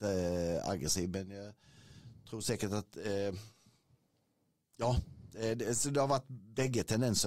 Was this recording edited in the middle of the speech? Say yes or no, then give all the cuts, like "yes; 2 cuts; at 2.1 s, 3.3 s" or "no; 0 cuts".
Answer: no; 0 cuts